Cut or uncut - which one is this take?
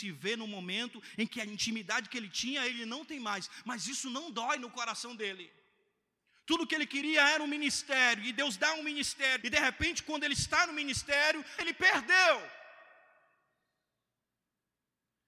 cut